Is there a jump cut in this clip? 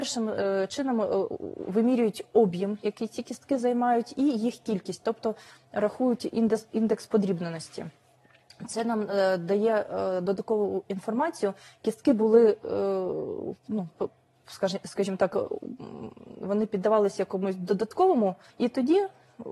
yes; 1 cut; at 18.5 s

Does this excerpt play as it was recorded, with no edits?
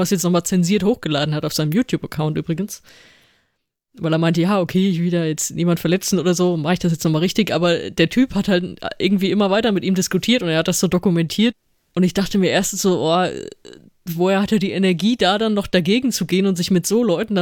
yes; 0 cuts

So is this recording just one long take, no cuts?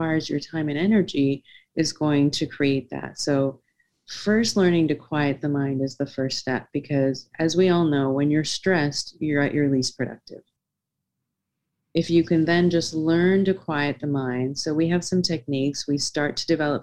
yes; 0 cuts

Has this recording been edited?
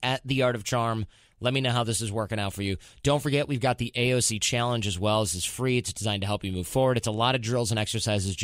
no; 0 cuts

